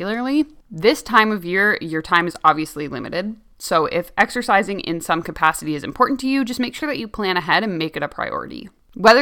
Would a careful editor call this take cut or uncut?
uncut